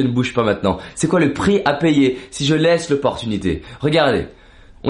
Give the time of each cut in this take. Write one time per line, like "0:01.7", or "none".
none